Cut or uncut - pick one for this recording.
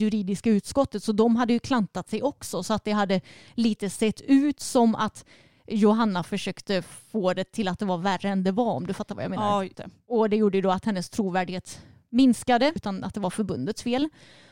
cut